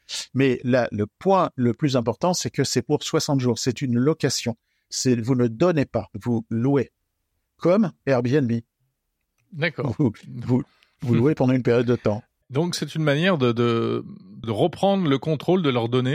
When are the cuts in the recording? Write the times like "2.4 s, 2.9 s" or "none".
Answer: 6.1 s, 12.7 s, 14.4 s

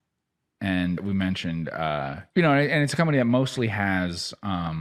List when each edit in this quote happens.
1.0 s, 2.3 s

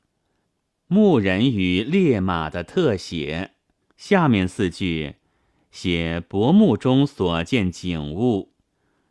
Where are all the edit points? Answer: 3.8 s

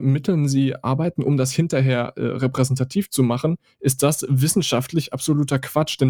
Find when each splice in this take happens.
none

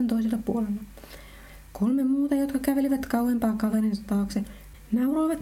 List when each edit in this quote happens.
none

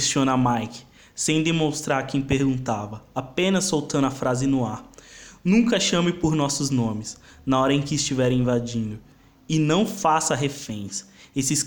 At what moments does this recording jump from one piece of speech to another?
none

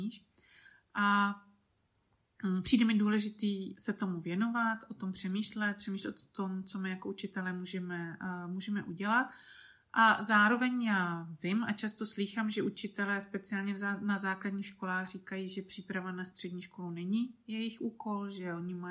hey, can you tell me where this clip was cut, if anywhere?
none

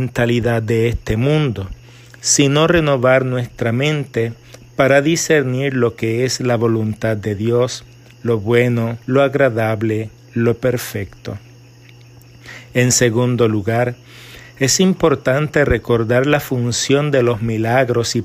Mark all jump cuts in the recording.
9.0 s

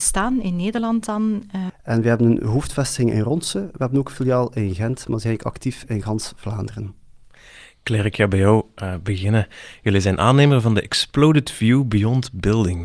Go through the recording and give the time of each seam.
1.7 s

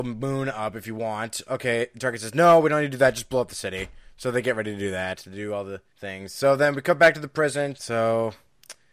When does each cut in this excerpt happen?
5.9 s, 7.7 s

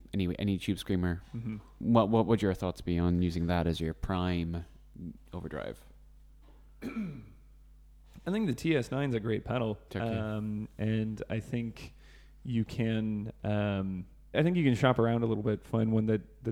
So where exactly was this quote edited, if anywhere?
9.9 s, 14.3 s

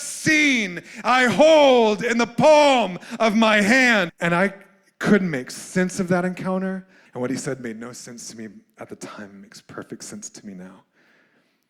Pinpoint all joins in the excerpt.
4.1 s, 7.1 s

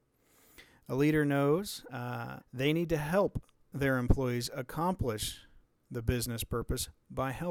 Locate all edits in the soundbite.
2.4 s

